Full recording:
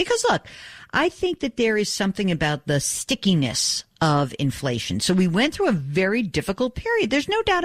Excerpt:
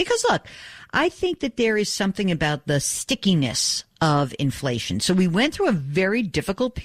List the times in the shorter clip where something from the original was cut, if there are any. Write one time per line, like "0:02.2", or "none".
none